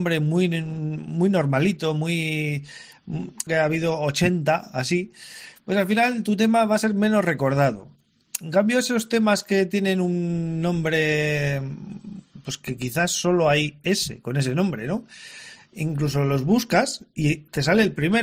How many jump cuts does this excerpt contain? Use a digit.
1